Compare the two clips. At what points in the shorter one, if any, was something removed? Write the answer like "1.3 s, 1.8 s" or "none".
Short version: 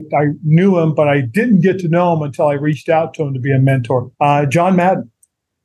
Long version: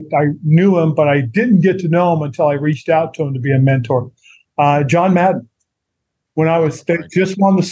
4.1 s